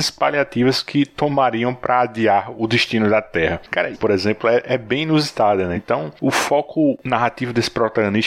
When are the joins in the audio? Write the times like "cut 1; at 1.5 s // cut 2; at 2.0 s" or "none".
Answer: cut 1; at 3.9 s // cut 2; at 5.7 s